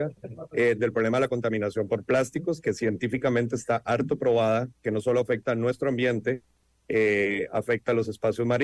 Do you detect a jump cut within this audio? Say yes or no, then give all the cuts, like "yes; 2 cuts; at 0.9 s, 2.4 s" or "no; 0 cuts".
no; 0 cuts